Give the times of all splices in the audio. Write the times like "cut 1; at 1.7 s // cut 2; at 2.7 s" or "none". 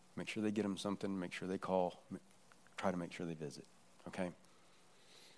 none

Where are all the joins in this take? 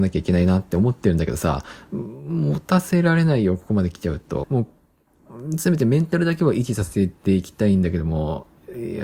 cut 1; at 4.4 s

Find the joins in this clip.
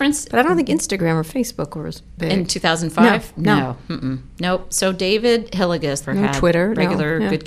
cut 1; at 6.0 s

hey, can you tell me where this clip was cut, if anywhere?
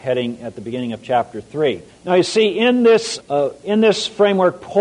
cut 1; at 1.9 s // cut 2; at 3.2 s

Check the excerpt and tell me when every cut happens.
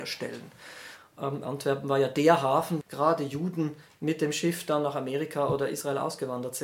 cut 1; at 1.0 s // cut 2; at 2.8 s

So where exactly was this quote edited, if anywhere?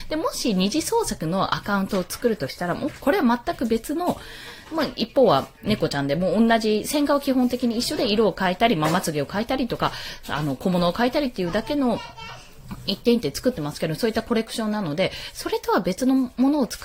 none

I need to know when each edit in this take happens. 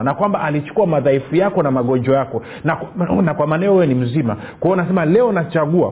none

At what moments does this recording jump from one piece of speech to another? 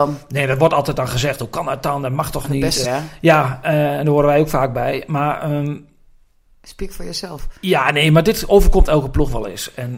cut 1; at 2.8 s

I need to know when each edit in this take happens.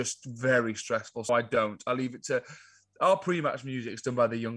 cut 1; at 1.3 s

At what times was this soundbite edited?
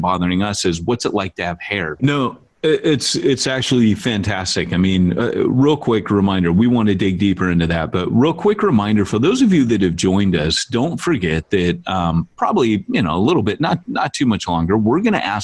cut 1; at 2.0 s

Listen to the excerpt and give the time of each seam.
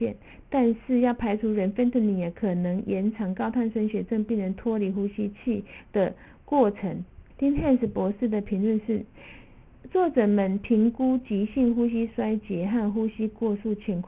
cut 1; at 7.3 s

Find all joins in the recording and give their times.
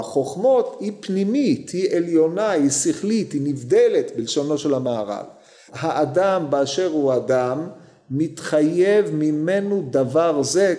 cut 1; at 5.7 s

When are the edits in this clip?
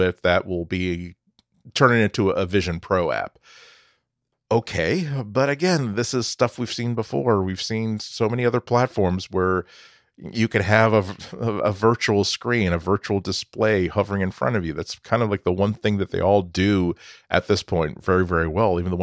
none

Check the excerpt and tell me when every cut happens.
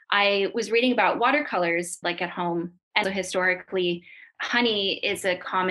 cut 1; at 2.0 s // cut 2; at 3.0 s

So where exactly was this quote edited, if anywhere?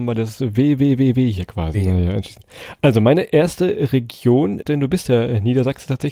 cut 1; at 1.7 s // cut 2; at 4.6 s

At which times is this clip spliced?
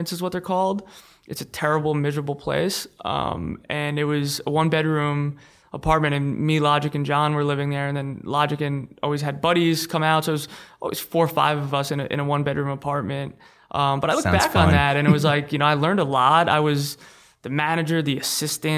none

